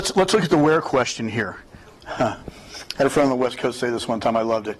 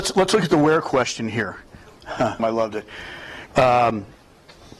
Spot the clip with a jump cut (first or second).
second